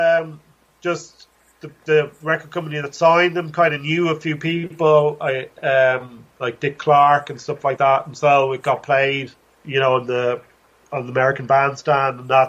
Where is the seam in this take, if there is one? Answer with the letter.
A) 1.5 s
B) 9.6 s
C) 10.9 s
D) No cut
B